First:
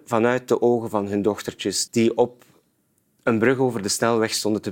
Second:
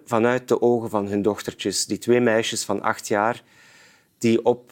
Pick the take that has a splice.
first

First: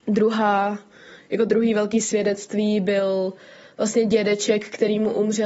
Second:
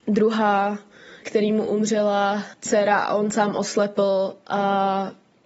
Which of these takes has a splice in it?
second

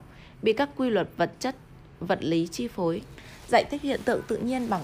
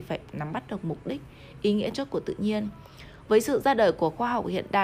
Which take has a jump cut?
second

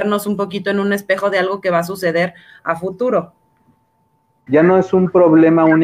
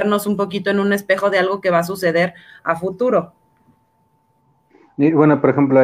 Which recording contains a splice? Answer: first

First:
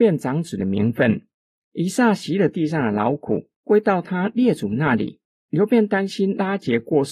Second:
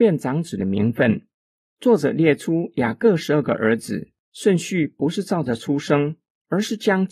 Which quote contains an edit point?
first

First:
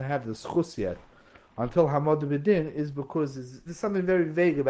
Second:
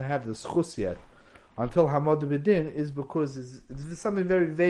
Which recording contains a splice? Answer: first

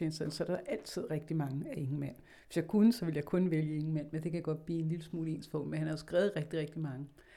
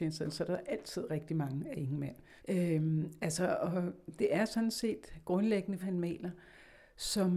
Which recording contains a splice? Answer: second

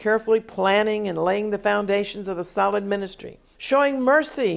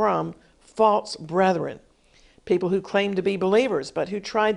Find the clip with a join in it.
first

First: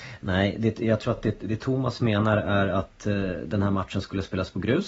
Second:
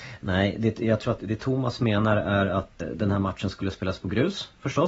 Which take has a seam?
second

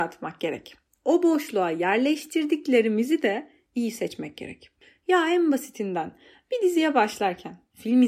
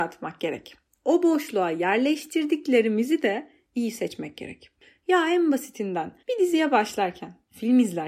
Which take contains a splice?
second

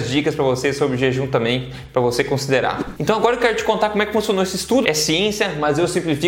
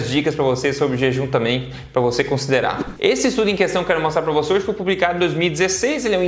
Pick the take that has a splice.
first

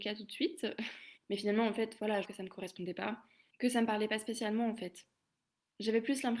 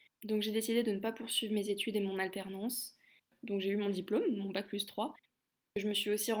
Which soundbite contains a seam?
first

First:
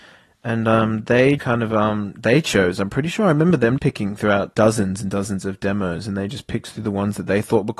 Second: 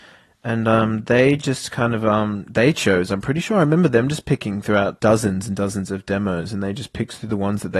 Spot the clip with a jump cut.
first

